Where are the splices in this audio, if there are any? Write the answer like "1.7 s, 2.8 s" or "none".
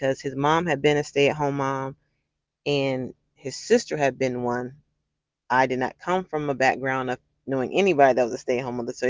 none

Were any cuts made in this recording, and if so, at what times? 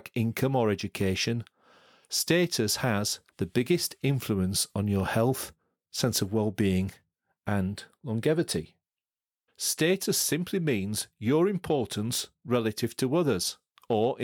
3.3 s, 9.5 s

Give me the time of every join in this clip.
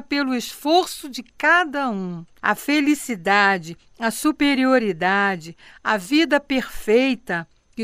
2.4 s

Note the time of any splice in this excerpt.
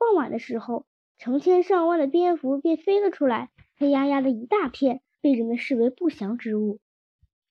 5.1 s

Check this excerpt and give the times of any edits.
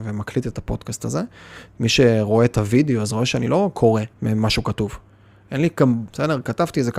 4.1 s, 6.1 s

